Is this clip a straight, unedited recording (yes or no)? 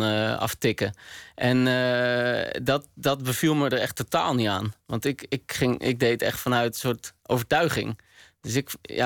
yes